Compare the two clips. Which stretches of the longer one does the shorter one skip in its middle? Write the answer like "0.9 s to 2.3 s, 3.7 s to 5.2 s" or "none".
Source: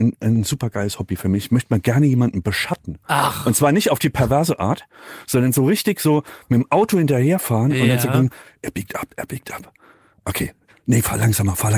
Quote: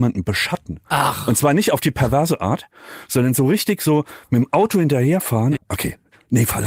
7.7 s to 10.1 s